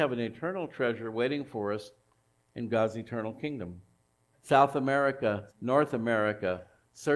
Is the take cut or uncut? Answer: cut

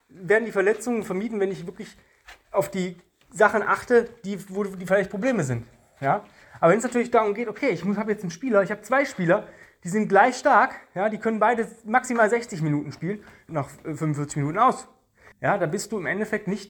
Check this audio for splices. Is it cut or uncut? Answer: cut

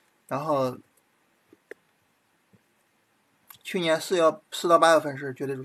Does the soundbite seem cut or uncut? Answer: uncut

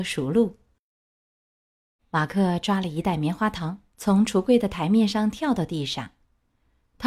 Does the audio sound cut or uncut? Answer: cut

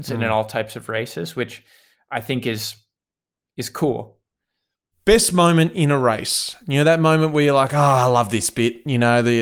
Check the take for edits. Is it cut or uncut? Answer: uncut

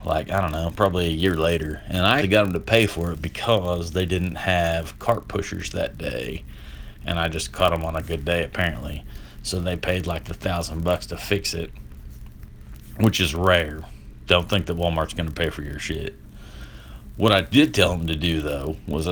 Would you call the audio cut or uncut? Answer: cut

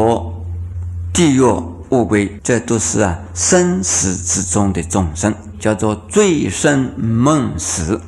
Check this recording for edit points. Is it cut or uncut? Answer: cut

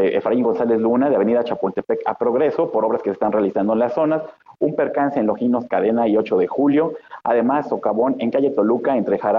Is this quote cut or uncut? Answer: uncut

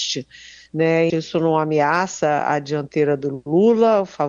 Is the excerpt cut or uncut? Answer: cut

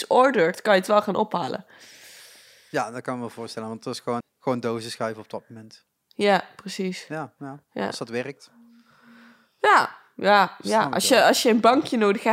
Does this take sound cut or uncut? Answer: cut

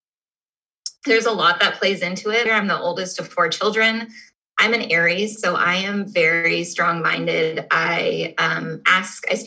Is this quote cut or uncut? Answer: cut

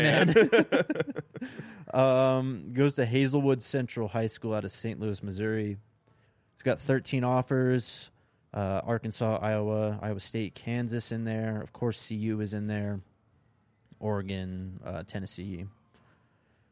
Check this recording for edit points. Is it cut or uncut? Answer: uncut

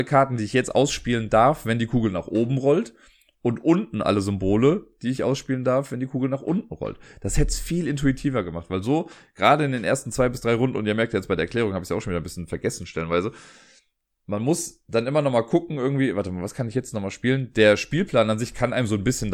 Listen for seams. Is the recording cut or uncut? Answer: uncut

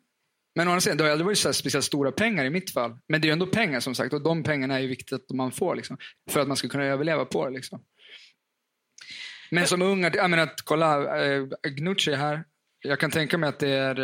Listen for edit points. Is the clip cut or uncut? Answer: cut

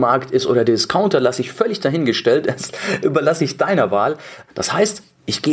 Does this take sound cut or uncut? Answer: cut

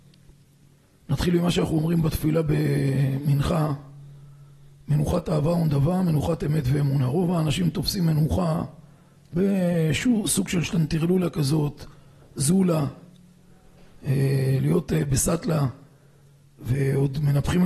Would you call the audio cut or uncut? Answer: uncut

